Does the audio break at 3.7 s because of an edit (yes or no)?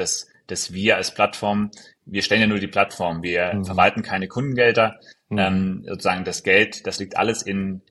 no